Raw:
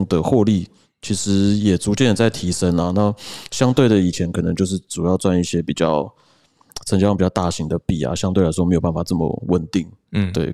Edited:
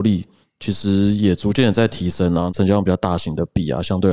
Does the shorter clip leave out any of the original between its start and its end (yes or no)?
yes